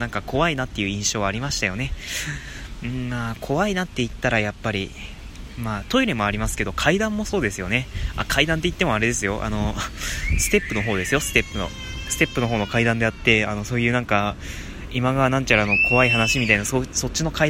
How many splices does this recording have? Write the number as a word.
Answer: one